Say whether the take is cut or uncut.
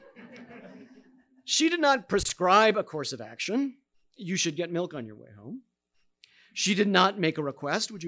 uncut